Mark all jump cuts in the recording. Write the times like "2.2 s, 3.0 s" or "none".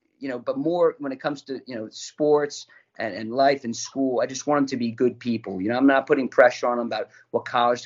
none